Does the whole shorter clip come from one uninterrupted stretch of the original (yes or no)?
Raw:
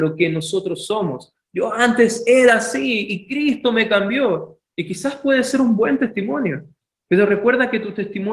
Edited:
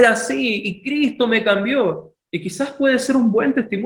yes